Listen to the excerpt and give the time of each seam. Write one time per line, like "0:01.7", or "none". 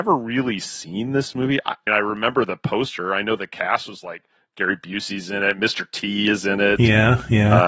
0:01.9